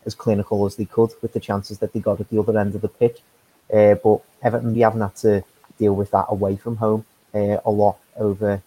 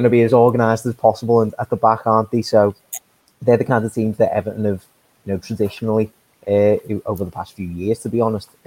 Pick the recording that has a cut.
first; 1 cut; at 4.7 s

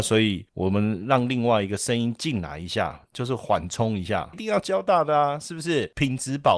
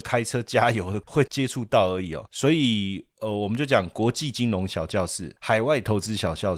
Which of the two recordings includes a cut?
first; 1 cut; at 4.3 s

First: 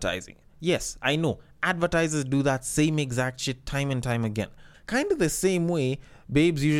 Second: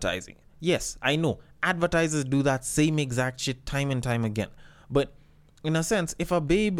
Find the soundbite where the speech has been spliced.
first; 1 cut; at 4.7 s

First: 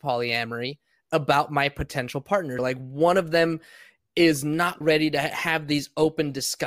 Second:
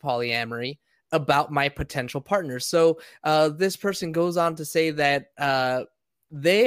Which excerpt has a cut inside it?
first; 2 cuts; at 2.6 s, 4.8 s

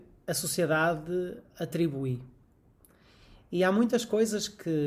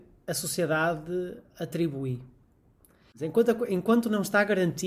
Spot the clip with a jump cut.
second; 1 cut; at 3.1 s

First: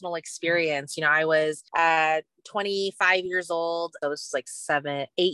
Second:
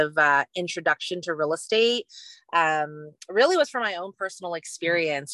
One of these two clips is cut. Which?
first; 2 cuts; at 1.7 s, 4.0 s

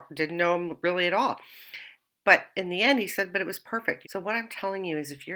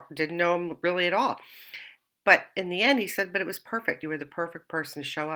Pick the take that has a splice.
first; 1 cut; at 4.0 s

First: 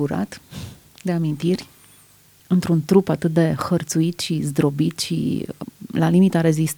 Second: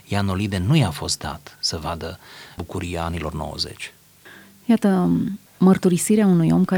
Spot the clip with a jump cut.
second; 1 cut; at 5.5 s

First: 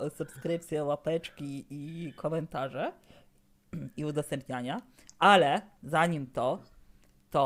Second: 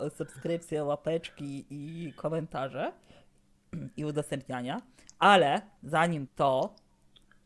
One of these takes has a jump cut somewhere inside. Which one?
second; 1 cut; at 6.3 s

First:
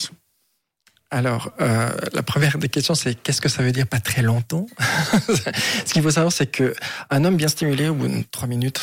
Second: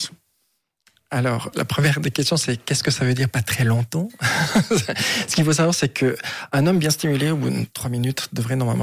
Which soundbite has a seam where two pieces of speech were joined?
second; 1 cut; at 1.5 s

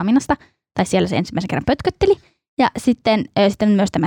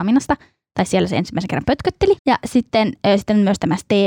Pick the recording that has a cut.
second; 1 cut; at 2.2 s

